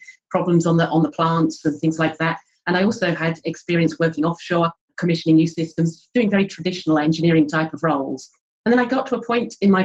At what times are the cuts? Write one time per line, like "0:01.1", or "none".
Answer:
none